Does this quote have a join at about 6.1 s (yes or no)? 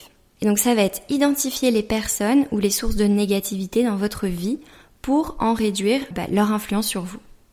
yes